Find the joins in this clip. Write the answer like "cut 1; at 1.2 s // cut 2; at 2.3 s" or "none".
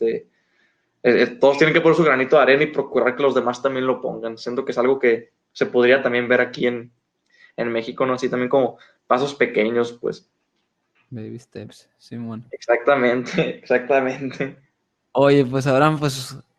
none

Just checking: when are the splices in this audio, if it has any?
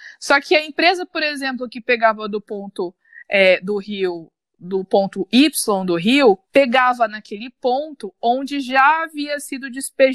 cut 1; at 6.4 s

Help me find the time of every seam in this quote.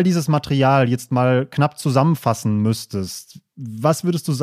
none

